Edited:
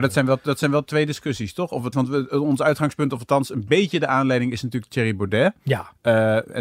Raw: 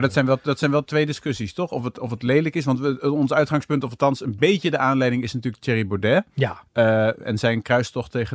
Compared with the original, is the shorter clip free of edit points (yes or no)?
no